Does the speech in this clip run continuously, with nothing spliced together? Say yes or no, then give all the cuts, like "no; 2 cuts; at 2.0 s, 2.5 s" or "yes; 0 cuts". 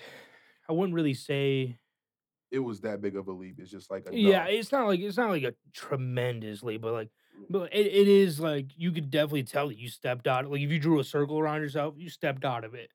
yes; 0 cuts